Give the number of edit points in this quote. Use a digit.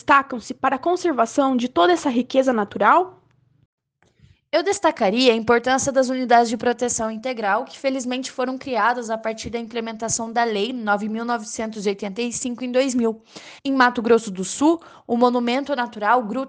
1